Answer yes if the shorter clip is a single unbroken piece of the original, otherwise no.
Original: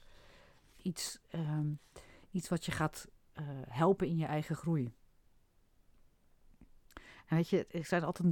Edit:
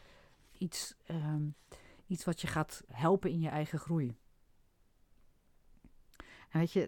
no